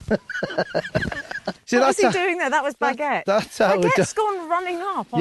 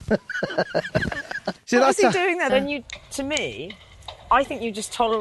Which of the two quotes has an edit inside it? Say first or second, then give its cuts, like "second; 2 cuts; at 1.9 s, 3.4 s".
second; 1 cut; at 2.5 s